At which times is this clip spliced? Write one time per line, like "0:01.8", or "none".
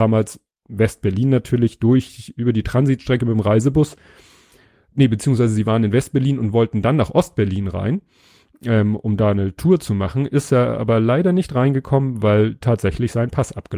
none